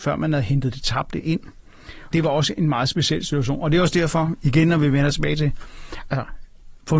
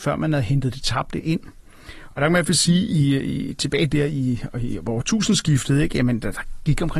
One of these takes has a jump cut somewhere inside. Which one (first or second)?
first